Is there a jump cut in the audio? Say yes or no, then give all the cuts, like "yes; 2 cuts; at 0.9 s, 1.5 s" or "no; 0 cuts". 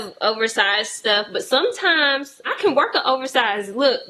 yes; 1 cut; at 2.5 s